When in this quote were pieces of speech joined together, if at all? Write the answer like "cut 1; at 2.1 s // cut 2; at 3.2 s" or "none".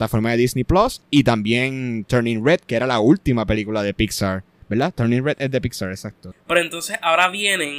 cut 1; at 6.3 s